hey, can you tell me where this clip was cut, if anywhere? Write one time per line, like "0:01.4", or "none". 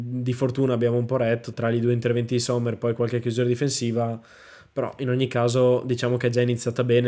0:01.5